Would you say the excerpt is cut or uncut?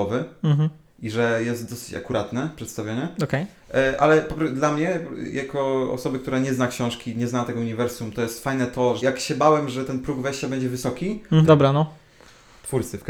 cut